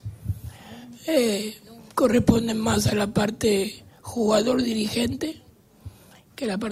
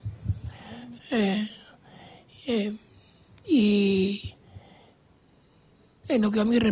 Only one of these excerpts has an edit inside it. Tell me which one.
second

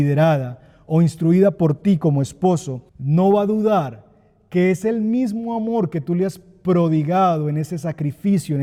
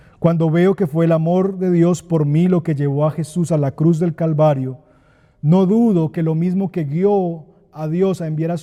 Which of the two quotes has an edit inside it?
first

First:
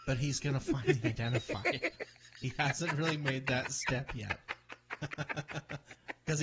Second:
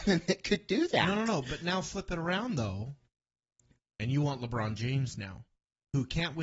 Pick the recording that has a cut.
second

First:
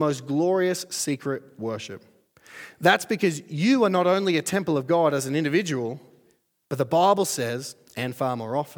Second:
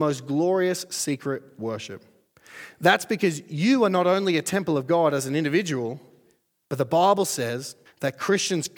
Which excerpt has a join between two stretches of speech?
second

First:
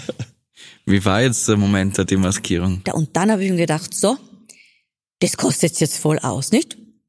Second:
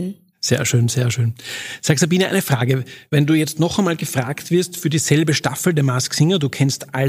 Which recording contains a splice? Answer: first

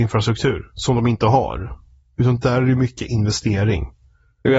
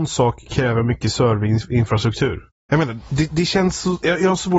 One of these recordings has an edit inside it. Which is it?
second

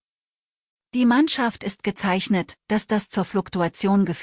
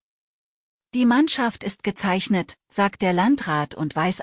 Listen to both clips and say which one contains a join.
first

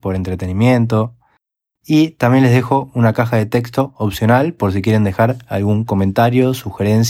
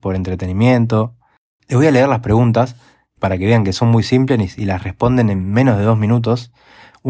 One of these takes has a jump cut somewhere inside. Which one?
second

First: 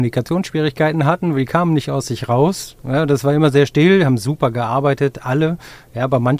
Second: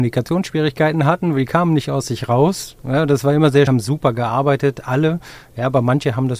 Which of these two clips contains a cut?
second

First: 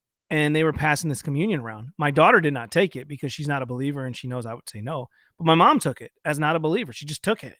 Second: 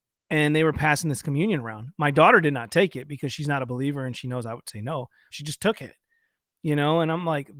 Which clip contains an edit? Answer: second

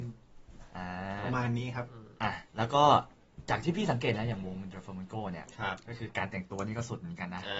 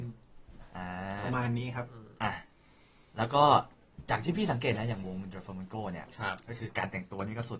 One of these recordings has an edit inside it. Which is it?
first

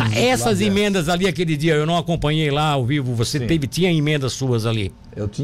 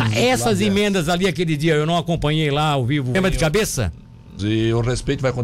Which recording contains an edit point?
second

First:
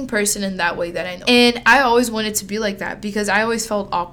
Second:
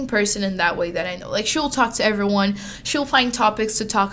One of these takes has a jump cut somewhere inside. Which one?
first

